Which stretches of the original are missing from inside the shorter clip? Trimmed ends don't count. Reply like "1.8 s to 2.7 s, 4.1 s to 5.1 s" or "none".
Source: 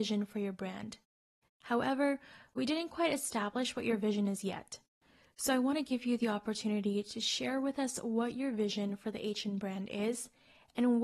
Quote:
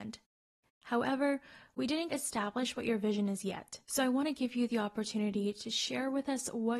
2.9 s to 3.1 s, 4.8 s to 5.3 s